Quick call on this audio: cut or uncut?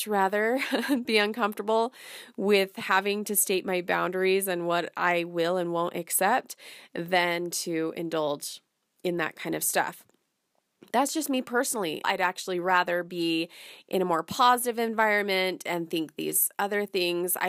cut